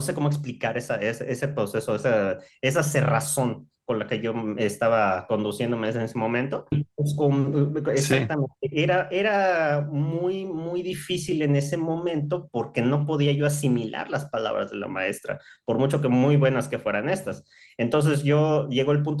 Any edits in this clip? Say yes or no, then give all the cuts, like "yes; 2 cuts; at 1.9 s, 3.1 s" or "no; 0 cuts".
yes; 1 cut; at 6.7 s